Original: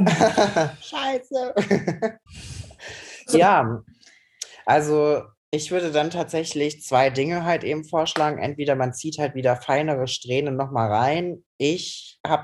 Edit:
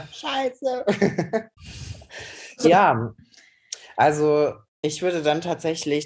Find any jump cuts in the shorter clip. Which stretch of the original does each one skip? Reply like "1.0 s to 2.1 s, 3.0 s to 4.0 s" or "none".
none